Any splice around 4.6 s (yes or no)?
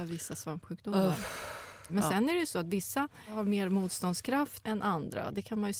yes